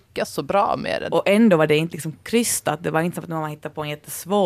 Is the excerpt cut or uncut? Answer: cut